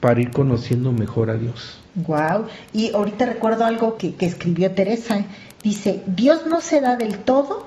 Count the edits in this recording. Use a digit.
2